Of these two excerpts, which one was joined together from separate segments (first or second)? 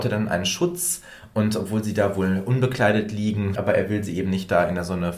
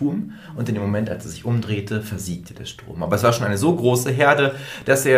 first